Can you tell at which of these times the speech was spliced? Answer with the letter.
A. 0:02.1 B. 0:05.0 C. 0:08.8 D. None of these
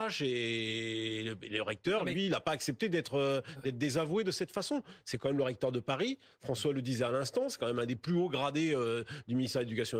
D